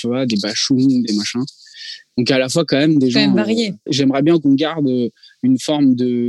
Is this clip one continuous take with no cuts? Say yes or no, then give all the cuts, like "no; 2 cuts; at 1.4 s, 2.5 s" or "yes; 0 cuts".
no; 1 cut; at 3.9 s